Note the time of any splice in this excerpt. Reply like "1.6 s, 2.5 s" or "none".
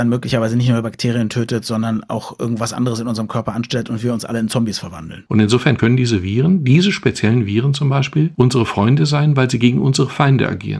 5.3 s